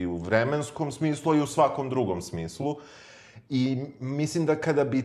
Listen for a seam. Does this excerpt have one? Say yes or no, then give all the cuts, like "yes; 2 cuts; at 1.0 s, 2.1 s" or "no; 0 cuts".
no; 0 cuts